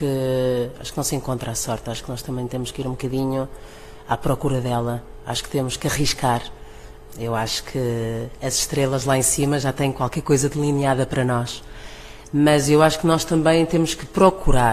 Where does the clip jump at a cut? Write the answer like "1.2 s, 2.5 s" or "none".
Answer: 7.1 s

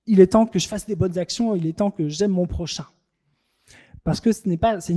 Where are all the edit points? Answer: none

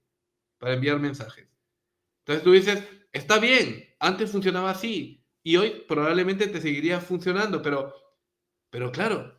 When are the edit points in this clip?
none

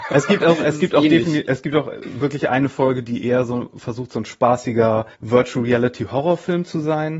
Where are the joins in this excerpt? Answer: 5.1 s

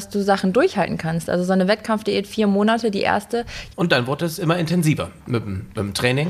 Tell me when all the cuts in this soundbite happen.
3.7 s

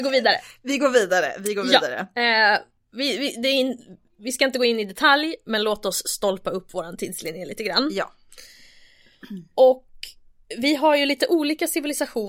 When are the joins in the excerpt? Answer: none

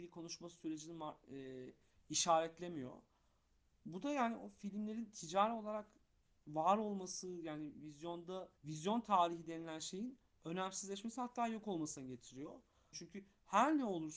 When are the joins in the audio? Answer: 8.6 s, 12.9 s

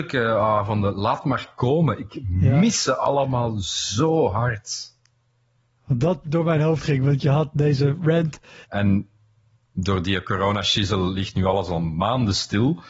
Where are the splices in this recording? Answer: 6.2 s, 8.6 s

